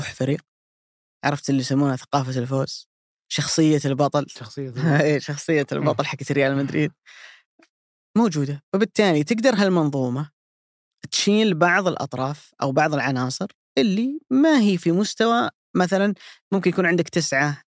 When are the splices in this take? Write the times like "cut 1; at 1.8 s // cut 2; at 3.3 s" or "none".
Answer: none